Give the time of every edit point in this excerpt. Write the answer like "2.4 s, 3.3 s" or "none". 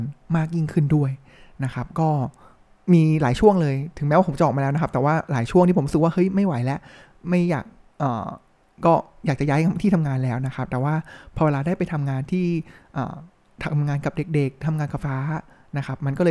15.0 s